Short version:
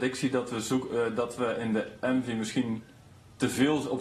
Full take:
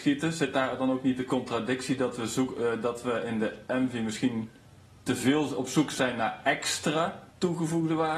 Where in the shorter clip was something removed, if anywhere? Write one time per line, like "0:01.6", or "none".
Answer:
none